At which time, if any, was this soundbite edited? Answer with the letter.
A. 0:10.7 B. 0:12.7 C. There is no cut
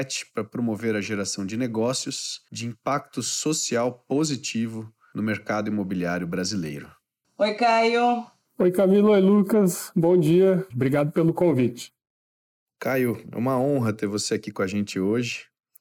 A